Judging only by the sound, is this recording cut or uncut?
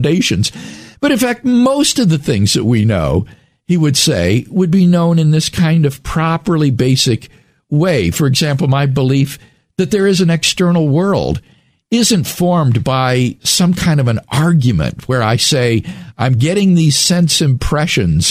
uncut